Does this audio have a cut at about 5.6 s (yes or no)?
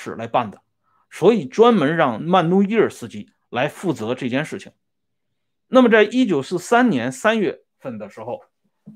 no